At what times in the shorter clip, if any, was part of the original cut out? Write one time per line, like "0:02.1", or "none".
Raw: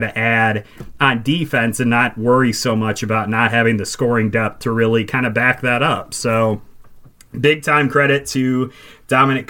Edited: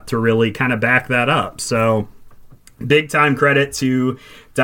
none